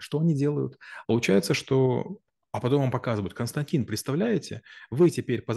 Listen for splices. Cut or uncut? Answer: cut